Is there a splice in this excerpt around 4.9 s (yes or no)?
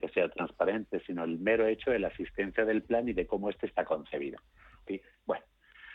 yes